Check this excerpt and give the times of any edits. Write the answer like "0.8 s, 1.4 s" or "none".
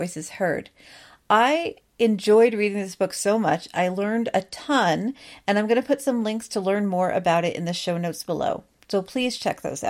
none